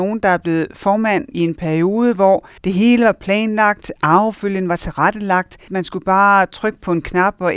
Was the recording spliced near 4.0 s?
no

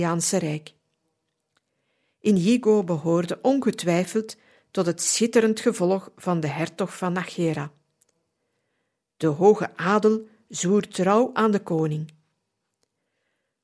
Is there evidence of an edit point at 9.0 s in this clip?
no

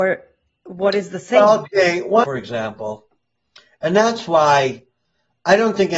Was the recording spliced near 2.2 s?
yes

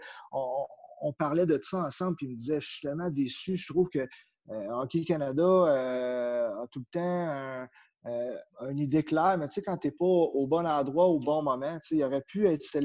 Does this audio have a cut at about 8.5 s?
yes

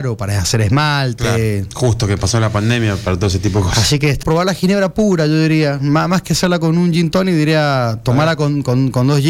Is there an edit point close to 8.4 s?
no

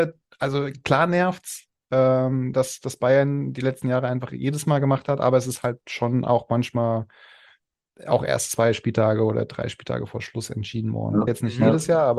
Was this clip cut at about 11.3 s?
yes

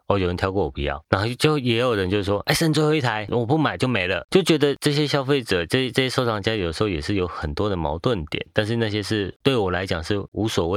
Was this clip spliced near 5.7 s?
no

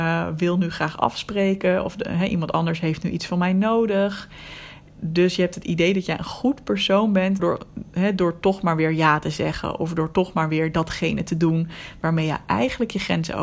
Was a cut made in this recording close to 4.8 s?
no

